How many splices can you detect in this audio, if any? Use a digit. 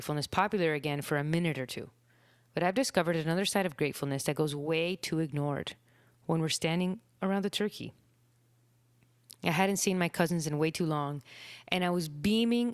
1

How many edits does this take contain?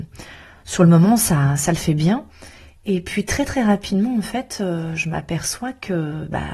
0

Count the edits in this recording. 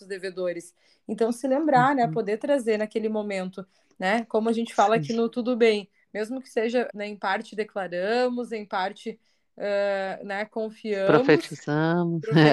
1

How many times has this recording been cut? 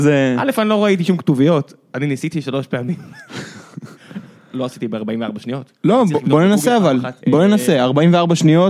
1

